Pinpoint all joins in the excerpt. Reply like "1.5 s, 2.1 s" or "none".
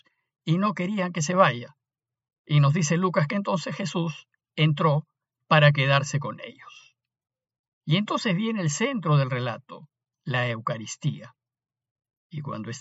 none